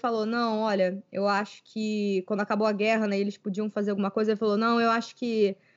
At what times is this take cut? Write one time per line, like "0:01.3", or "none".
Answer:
none